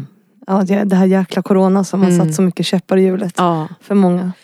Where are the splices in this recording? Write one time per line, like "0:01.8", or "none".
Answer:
none